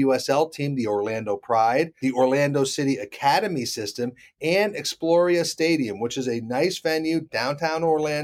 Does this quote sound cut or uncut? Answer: uncut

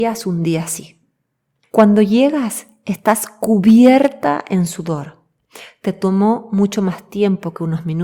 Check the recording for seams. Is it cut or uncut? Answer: cut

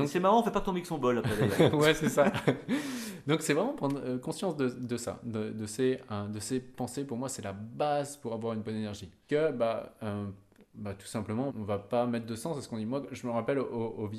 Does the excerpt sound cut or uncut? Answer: cut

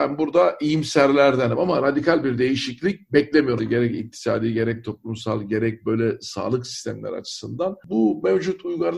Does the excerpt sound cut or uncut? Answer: cut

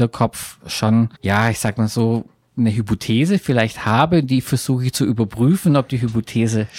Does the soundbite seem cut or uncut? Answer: cut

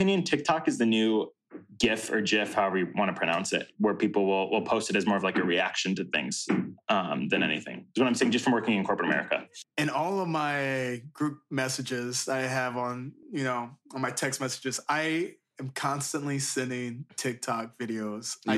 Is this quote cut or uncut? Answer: uncut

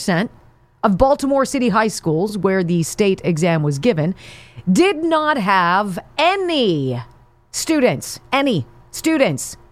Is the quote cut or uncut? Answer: uncut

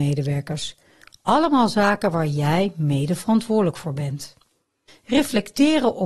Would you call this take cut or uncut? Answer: cut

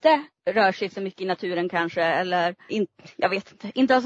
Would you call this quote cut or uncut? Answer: cut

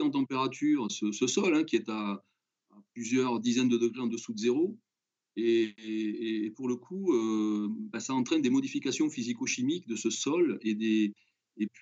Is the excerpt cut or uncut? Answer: uncut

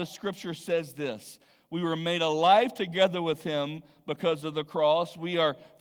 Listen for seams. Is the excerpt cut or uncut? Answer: uncut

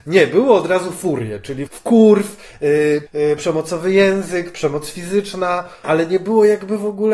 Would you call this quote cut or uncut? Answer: cut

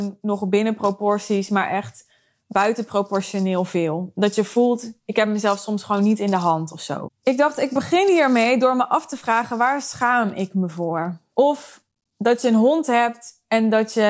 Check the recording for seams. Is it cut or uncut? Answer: cut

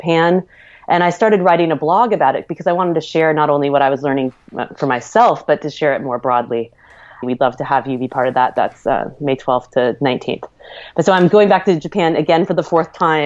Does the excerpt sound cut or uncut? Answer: cut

